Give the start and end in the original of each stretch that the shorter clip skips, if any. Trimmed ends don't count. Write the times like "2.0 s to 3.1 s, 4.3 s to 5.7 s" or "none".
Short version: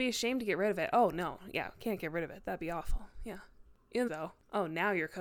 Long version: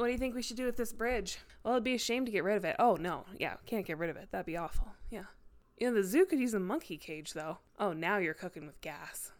5.9 s to 7.3 s